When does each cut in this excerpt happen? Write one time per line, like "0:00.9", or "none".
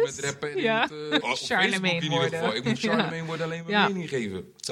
0:01.2